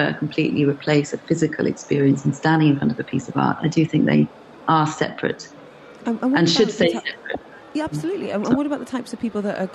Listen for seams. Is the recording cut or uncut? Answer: uncut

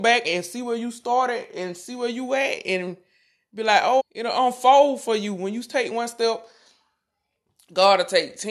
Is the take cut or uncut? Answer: cut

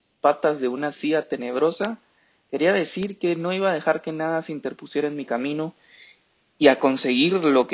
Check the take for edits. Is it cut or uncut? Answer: uncut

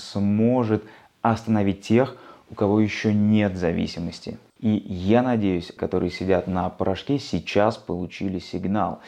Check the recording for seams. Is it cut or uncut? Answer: cut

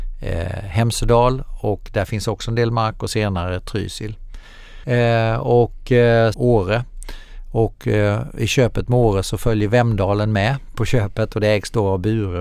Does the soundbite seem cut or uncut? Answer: cut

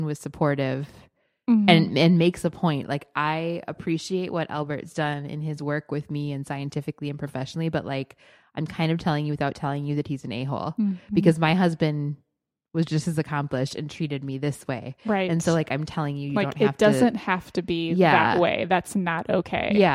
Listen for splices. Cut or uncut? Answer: uncut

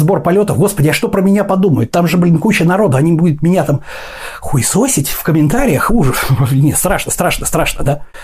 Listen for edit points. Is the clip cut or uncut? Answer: uncut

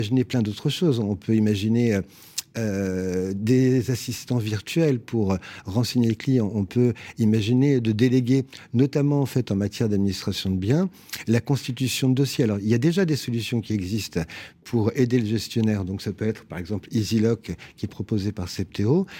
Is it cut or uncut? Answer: uncut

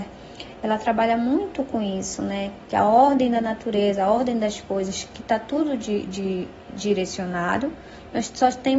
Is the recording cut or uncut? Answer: uncut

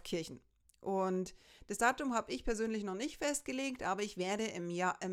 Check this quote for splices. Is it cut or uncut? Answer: uncut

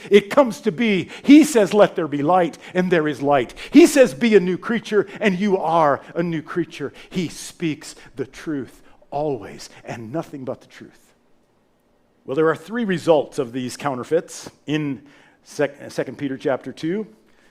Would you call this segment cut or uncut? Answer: cut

